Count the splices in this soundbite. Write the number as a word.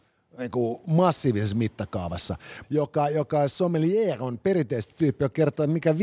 one